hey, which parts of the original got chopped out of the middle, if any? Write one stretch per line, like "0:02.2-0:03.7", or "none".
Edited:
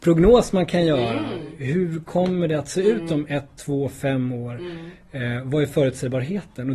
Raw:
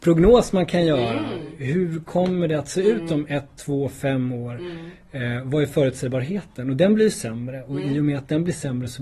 none